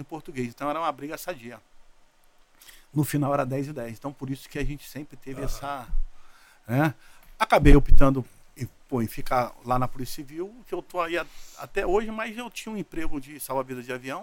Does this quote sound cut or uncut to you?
uncut